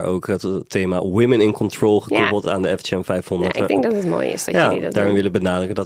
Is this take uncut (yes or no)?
yes